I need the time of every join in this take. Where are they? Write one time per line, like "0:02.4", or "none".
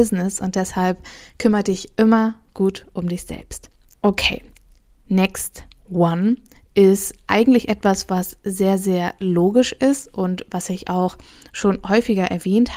0:03.9